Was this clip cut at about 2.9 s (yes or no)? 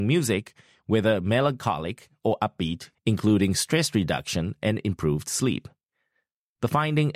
yes